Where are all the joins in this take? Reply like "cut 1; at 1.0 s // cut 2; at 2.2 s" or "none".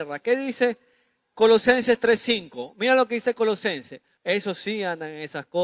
cut 1; at 4.2 s